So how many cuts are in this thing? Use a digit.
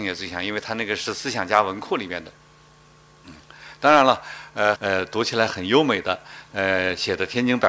2